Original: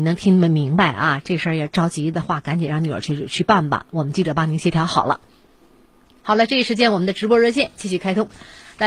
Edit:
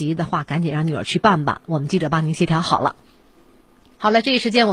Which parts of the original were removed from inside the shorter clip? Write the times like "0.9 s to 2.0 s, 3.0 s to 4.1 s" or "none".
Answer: 3.0 s to 3.3 s